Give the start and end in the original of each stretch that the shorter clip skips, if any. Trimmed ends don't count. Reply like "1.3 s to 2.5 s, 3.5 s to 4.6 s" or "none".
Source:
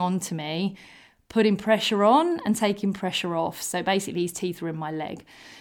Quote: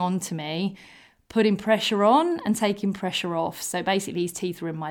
none